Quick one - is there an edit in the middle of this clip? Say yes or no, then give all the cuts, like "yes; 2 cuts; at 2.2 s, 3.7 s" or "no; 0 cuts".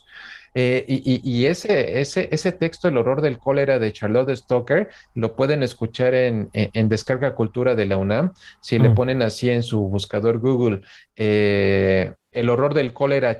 yes; 1 cut; at 12.3 s